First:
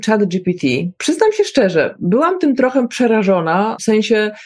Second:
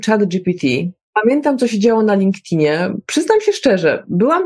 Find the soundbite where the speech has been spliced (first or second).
first